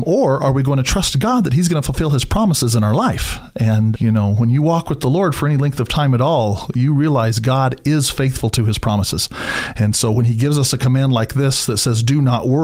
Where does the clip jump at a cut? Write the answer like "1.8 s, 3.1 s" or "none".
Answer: 3.9 s